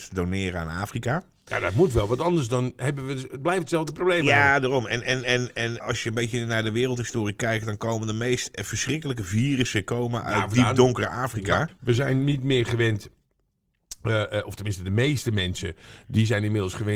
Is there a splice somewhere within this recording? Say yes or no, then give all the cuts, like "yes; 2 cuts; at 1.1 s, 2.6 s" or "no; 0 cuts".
yes; 2 cuts; at 5.8 s, 11.7 s